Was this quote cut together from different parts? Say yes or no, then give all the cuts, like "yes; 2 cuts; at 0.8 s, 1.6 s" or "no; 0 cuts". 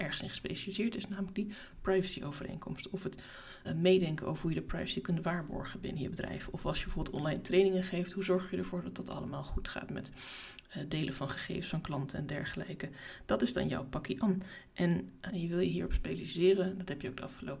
yes; 2 cuts; at 3.6 s, 15.3 s